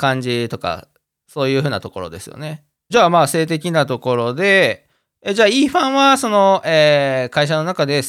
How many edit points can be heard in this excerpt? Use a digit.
1